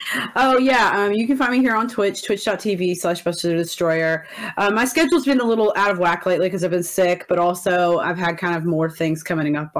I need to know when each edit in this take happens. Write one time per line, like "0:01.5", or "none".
0:08.0